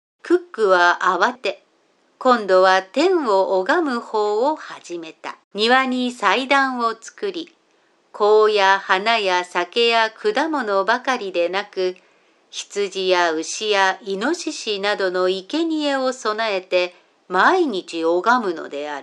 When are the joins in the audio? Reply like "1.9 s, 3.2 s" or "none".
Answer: 1.4 s, 5.4 s